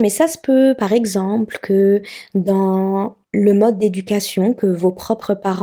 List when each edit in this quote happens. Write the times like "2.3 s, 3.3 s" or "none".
3.2 s